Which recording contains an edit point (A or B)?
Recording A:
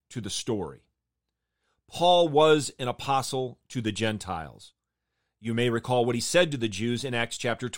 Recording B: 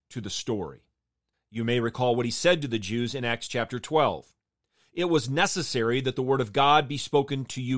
B